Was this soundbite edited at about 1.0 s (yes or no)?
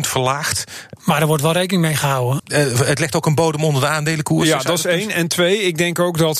yes